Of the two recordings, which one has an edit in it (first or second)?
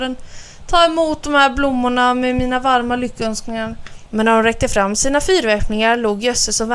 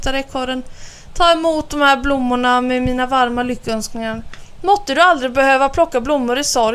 first